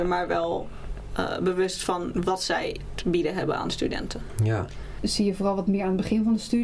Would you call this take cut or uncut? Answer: cut